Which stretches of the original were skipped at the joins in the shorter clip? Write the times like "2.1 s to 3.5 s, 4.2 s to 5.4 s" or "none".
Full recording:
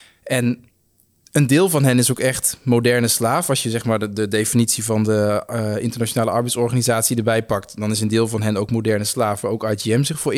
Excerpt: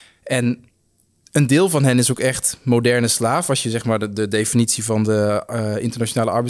none